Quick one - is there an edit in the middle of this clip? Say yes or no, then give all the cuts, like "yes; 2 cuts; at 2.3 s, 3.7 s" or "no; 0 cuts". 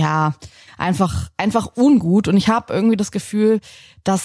no; 0 cuts